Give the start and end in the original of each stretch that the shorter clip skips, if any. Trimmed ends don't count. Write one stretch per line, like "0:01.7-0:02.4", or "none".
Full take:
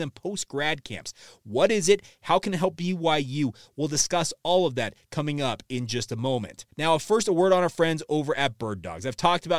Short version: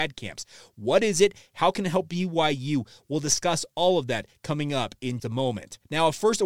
0:05.9-0:06.1